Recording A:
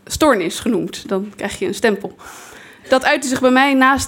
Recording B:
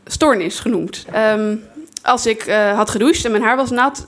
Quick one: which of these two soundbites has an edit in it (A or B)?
B